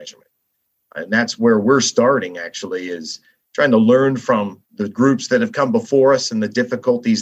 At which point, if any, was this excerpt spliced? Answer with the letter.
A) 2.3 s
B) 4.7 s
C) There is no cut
B